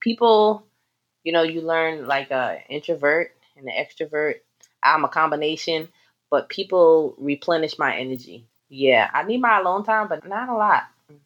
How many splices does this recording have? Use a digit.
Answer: 2